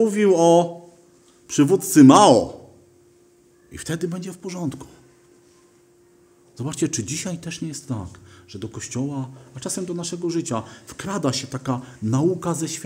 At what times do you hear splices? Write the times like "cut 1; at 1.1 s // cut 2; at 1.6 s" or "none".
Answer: none

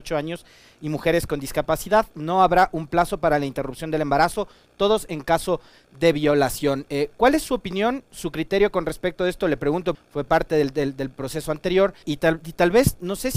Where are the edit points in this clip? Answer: cut 1; at 9.9 s // cut 2; at 12.0 s

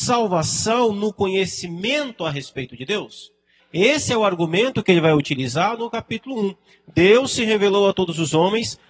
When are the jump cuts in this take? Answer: cut 1; at 3.6 s

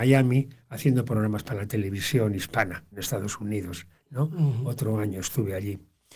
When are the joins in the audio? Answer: cut 1; at 2.9 s

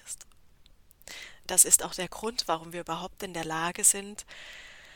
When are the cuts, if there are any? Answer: cut 1; at 1.4 s

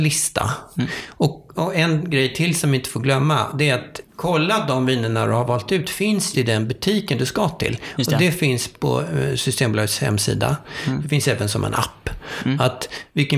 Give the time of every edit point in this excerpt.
cut 1; at 1.5 s // cut 2; at 6.3 s

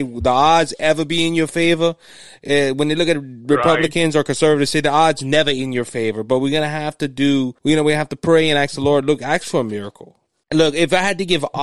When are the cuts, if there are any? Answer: cut 1; at 7.6 s // cut 2; at 10.4 s

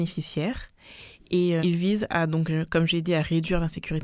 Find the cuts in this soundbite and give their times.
cut 1; at 1.6 s

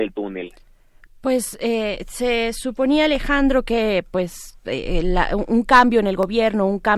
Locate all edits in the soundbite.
none

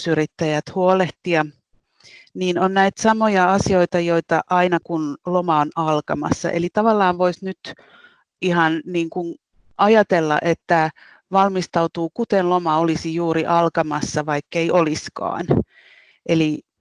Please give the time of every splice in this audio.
none

